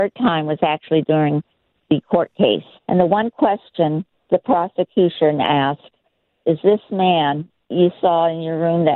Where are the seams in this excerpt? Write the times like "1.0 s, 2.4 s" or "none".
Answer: 2.8 s